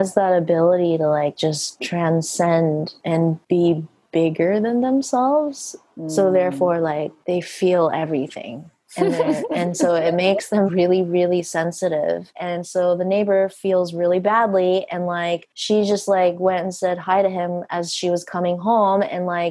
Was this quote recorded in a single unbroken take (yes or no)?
no